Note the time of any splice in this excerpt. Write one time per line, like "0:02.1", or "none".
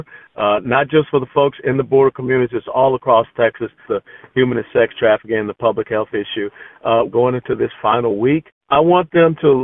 0:03.8
0:07.1
0:08.5